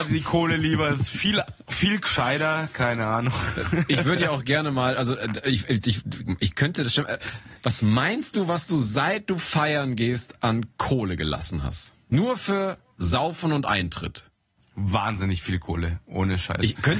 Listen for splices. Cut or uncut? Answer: uncut